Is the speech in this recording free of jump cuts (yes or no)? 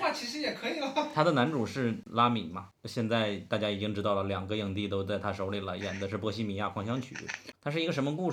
yes